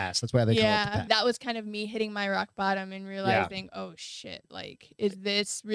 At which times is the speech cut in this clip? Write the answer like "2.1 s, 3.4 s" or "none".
1.1 s

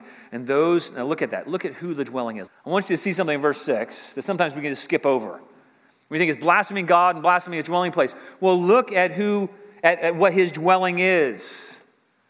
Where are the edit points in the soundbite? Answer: 2.5 s

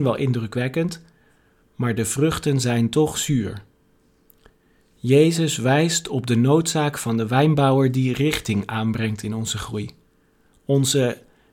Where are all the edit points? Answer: none

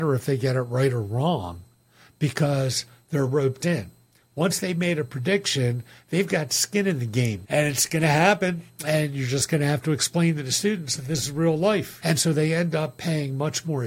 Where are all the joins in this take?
7.4 s, 12.0 s

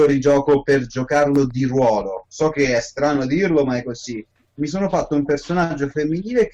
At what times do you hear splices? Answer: none

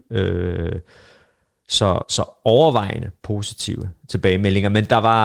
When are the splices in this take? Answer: 2.0 s

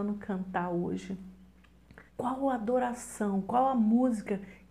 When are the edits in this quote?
2.1 s

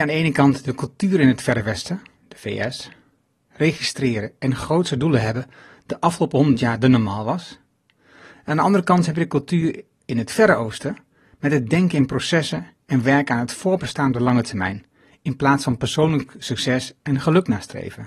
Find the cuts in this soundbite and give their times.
3.5 s

